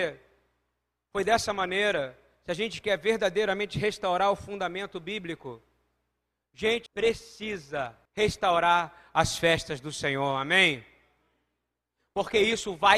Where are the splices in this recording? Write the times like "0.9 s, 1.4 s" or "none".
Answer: 6.9 s, 8.1 s